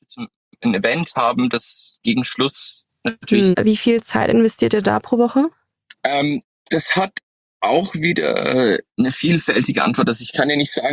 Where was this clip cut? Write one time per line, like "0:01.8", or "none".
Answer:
0:03.5